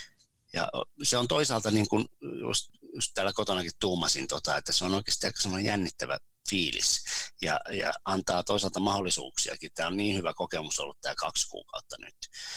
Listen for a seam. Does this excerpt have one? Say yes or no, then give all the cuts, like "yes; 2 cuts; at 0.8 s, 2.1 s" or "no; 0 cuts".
no; 0 cuts